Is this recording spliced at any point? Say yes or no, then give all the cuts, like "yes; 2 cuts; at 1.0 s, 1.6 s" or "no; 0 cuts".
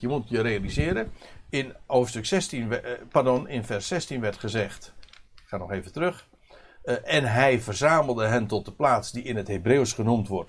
no; 0 cuts